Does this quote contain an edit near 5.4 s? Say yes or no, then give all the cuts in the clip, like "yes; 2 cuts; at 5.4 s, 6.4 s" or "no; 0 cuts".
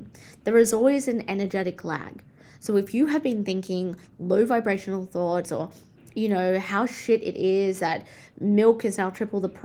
yes; 1 cut; at 5.4 s